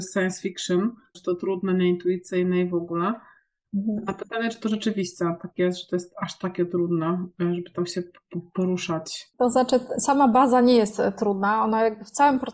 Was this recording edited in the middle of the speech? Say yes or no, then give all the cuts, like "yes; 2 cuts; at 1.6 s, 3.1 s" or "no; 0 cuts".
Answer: yes; 1 cut; at 1.1 s